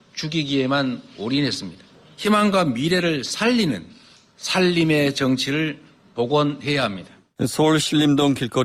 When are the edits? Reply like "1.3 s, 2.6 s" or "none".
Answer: 7.4 s